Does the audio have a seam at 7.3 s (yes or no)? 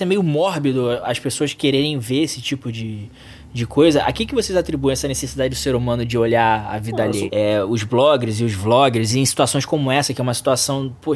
yes